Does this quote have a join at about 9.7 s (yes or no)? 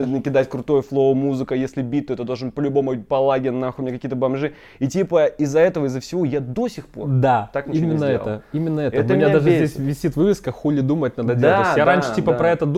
no